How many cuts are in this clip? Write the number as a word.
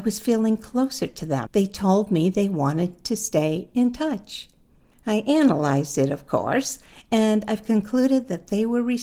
one